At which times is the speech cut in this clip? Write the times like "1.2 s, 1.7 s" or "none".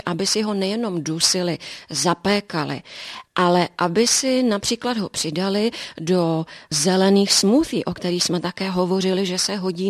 none